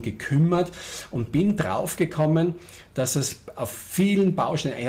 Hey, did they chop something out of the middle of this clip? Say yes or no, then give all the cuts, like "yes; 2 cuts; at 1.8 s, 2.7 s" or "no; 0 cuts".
no; 0 cuts